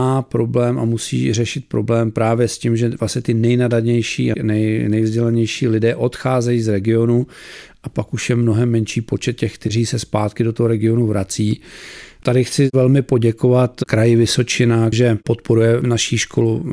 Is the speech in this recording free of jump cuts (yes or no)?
no